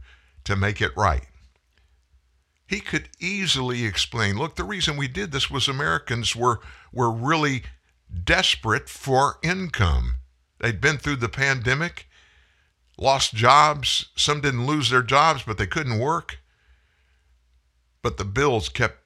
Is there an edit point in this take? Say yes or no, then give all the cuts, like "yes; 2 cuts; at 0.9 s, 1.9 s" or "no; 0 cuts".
no; 0 cuts